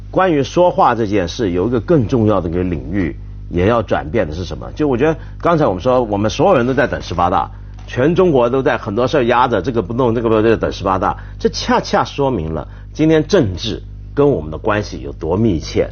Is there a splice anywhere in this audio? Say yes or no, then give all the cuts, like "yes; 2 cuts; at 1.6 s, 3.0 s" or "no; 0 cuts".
no; 0 cuts